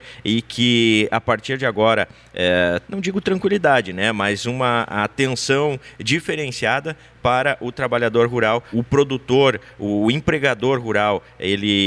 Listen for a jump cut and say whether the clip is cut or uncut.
cut